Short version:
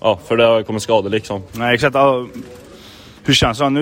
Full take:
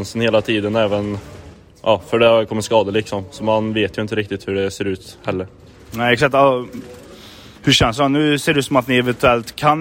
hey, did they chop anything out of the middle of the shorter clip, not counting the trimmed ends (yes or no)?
yes